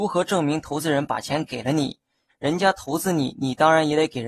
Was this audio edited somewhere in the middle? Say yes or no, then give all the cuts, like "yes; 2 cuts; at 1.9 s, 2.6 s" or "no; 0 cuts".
yes; 1 cut; at 2.3 s